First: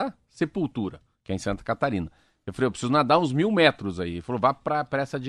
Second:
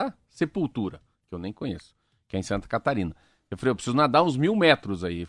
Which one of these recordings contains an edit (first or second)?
first